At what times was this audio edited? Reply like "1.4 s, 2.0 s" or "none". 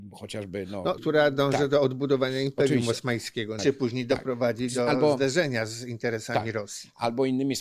1.0 s, 3.6 s